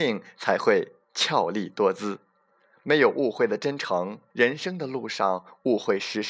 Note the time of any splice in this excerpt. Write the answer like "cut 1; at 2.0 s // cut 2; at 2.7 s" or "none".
cut 1; at 4.3 s